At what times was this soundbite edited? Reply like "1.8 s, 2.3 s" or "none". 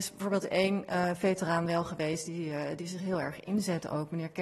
none